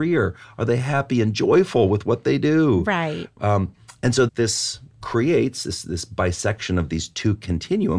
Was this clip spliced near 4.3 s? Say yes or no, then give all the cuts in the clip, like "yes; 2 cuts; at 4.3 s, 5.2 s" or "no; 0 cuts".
yes; 1 cut; at 4.3 s